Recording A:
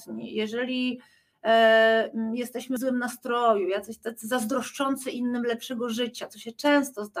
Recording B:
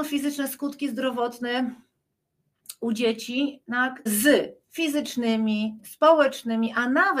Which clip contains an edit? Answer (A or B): B